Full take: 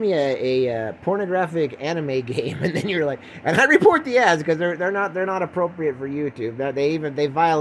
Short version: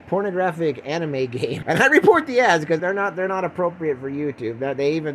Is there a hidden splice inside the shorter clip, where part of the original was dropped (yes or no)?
yes